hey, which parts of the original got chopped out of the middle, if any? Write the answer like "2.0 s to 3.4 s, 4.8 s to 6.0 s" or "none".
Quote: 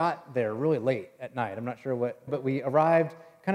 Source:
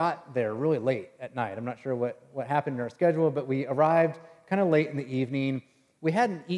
2.3 s to 3.3 s